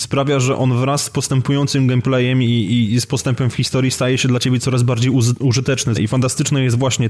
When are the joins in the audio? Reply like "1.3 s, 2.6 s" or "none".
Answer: 5.9 s

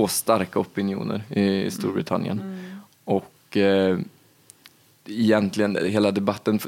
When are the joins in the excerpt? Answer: none

